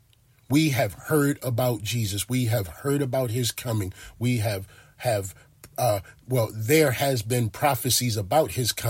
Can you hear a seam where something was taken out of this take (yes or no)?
no